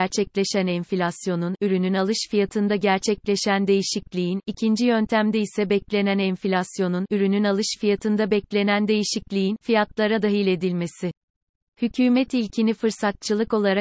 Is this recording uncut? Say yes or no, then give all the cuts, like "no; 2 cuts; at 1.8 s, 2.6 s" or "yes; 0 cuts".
yes; 0 cuts